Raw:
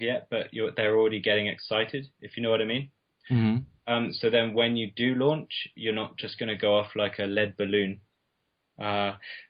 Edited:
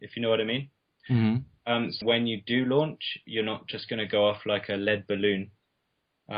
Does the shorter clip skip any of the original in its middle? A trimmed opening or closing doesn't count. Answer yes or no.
yes